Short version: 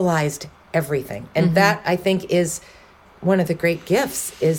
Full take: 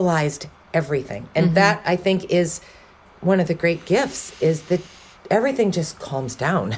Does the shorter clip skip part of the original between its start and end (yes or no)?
no